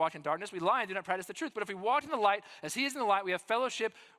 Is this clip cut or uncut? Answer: uncut